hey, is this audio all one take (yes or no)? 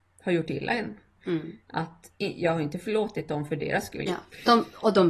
no